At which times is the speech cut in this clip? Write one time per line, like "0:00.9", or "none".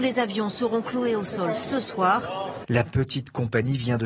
0:02.6